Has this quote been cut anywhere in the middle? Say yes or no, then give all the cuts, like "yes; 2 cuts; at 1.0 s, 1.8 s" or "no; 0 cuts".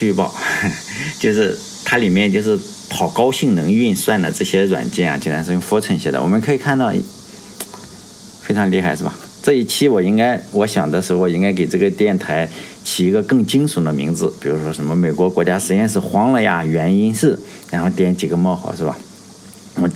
no; 0 cuts